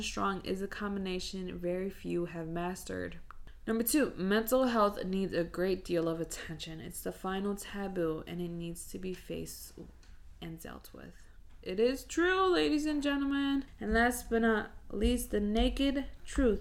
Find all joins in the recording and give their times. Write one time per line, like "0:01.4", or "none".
none